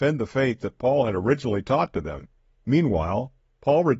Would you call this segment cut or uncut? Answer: cut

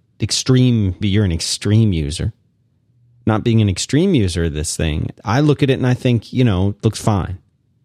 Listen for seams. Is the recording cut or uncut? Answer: cut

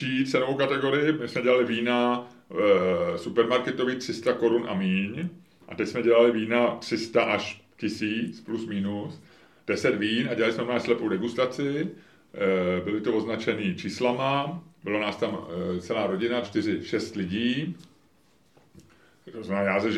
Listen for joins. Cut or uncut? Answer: cut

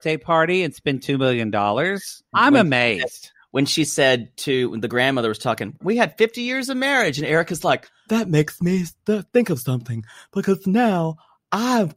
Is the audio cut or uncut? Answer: cut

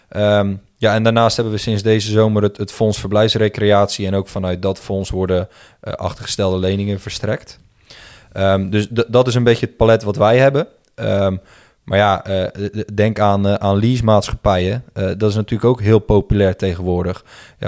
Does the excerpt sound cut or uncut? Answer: uncut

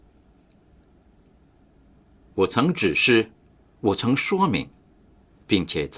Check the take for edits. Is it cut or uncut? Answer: cut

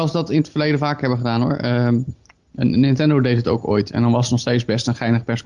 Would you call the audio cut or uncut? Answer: uncut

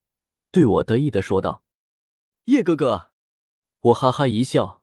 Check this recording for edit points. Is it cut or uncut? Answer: cut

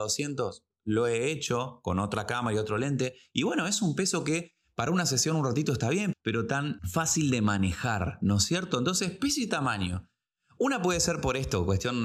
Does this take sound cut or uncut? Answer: cut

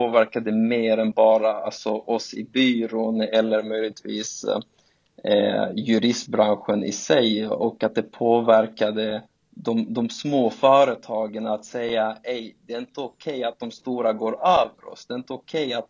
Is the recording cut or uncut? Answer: uncut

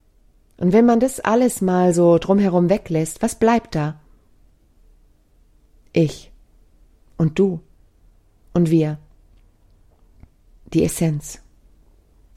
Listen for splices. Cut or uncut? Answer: uncut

